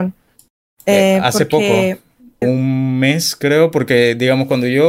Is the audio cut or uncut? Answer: cut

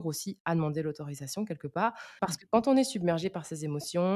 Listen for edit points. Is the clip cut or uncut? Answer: cut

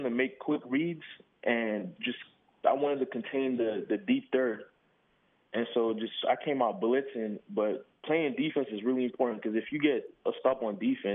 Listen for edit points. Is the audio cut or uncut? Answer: uncut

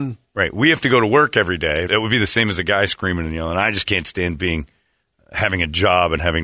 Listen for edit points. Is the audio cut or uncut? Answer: cut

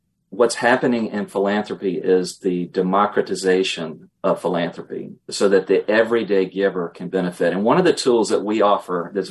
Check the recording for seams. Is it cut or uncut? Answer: uncut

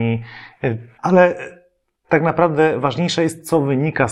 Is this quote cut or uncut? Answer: cut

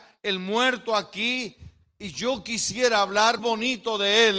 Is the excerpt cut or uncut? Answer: cut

